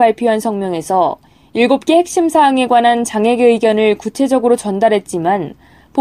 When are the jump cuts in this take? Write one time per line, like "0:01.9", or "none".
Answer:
none